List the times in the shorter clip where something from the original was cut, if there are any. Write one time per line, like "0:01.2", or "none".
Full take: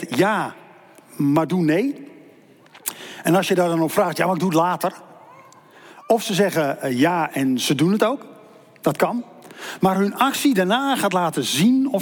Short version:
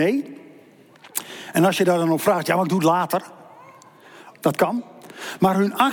0:04.3